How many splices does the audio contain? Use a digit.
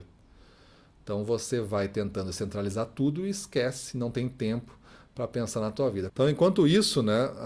1